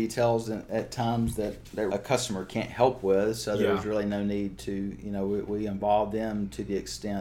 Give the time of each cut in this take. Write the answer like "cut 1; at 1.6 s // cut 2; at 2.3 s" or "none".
cut 1; at 1.9 s

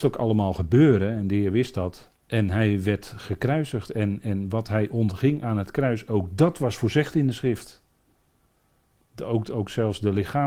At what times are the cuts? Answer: cut 1; at 2.2 s

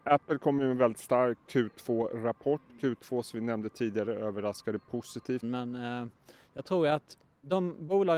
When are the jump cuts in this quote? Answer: cut 1; at 1.5 s // cut 2; at 5.4 s

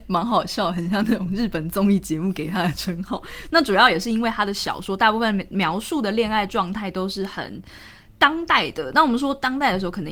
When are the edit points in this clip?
cut 1; at 3.5 s

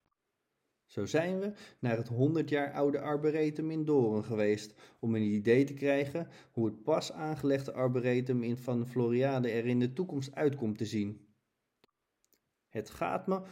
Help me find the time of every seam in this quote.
cut 1; at 12.5 s

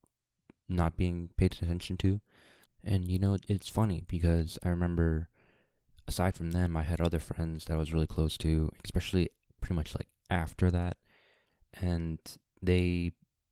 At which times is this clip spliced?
cut 1; at 2.6 s

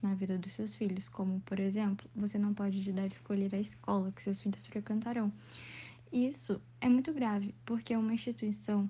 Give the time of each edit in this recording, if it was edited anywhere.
none

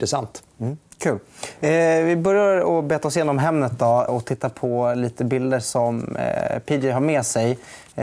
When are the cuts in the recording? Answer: cut 1; at 4.1 s

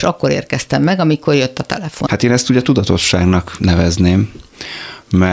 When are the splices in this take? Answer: cut 1; at 2.1 s

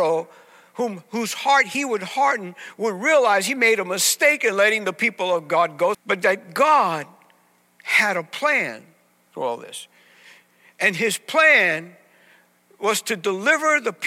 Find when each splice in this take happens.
cut 1; at 5.9 s

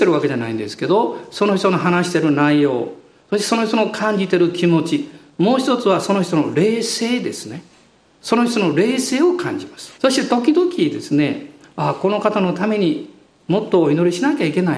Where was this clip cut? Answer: cut 1; at 9.9 s

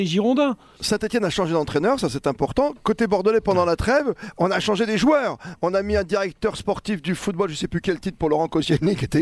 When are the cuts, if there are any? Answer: none

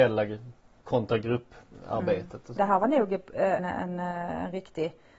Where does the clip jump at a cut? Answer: cut 1; at 2.6 s // cut 2; at 3.6 s

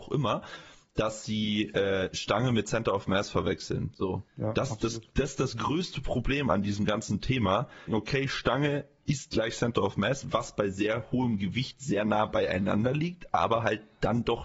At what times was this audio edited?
cut 1; at 4.3 s // cut 2; at 7.9 s

